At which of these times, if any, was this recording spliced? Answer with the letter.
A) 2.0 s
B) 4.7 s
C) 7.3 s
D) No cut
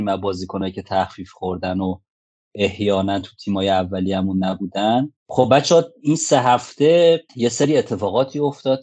C